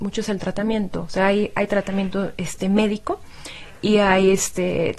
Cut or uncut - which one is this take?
uncut